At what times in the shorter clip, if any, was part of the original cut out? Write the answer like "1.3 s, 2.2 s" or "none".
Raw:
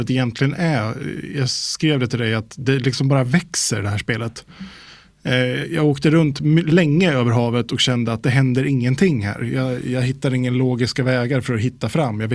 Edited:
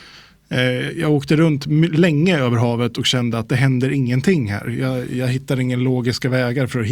none